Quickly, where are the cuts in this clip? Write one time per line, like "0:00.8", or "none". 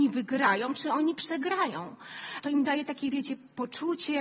0:02.4